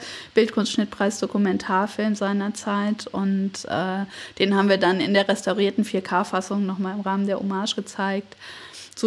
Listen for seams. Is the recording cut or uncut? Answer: uncut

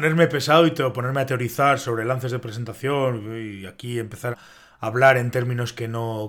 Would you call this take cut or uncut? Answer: cut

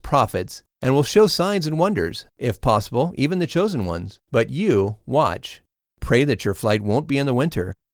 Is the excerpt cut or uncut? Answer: cut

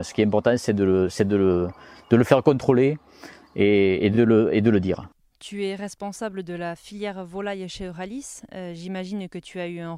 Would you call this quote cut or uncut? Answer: uncut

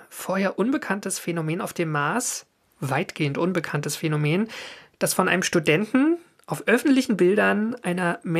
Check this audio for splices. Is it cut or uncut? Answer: uncut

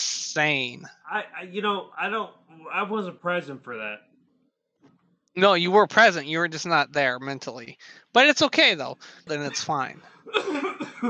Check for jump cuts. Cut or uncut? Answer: cut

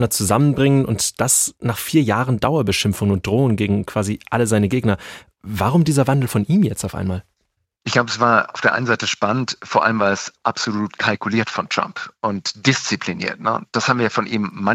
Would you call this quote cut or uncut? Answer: uncut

